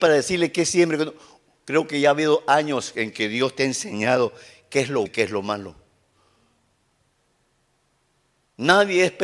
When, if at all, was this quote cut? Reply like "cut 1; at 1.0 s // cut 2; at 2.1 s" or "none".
cut 1; at 5.1 s

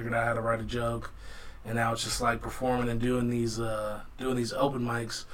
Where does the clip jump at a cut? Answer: none

